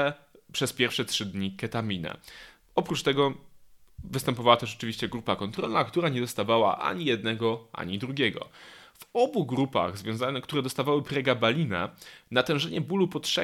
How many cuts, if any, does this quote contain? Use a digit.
0